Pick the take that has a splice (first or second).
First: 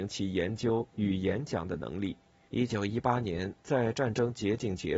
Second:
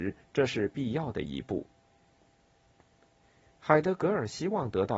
first